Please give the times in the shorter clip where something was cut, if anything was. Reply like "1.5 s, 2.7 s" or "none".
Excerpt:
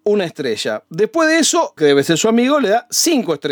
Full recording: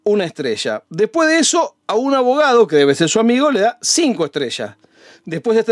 1.8 s